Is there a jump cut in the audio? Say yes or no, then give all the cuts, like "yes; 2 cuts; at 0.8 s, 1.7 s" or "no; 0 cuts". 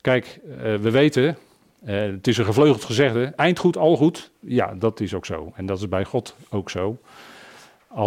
no; 0 cuts